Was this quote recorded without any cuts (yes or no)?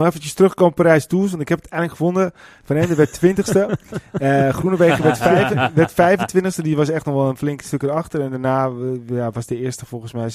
yes